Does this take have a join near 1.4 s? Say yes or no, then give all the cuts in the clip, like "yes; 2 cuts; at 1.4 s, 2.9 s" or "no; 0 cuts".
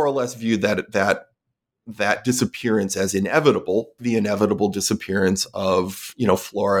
no; 1 cut; at 4.0 s